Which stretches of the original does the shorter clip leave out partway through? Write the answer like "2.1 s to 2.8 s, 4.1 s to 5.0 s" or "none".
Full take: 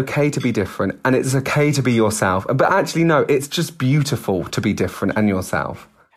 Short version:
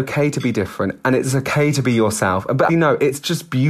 2.7 s to 3.0 s